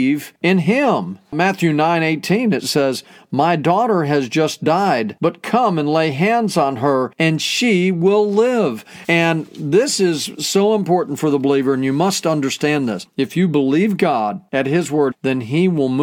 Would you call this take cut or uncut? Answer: cut